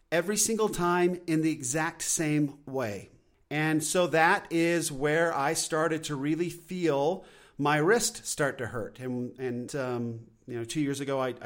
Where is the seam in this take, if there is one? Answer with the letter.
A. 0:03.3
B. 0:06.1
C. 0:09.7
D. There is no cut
C